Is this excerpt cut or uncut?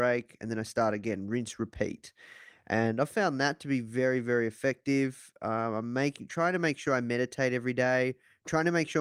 uncut